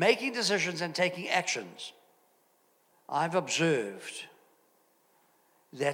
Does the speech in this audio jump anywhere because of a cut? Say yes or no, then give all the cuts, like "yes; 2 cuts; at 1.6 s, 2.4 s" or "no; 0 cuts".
yes; 1 cut; at 2.9 s